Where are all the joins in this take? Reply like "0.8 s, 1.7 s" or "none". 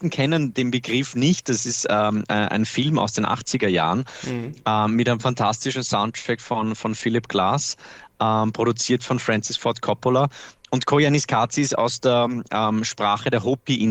none